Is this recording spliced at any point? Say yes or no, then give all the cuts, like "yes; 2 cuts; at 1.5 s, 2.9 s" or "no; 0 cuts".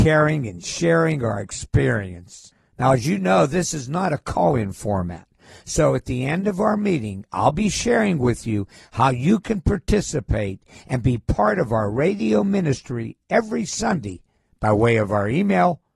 no; 0 cuts